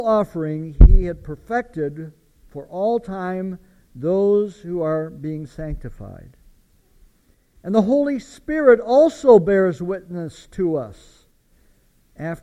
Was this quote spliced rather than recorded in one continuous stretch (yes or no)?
no